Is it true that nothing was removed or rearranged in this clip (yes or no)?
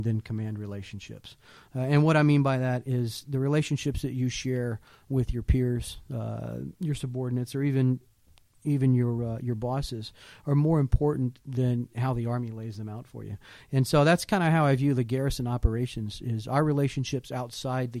yes